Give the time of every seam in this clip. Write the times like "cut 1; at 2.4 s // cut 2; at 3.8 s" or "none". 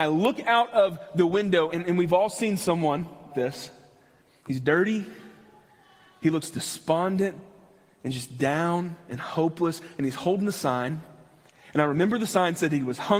cut 1; at 1.7 s // cut 2; at 3.3 s